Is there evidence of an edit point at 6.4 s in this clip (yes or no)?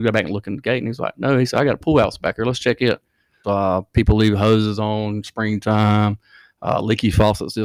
no